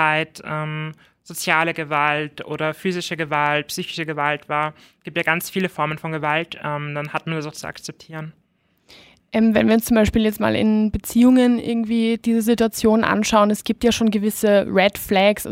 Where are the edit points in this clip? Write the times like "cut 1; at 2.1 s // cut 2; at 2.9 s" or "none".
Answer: cut 1; at 7.5 s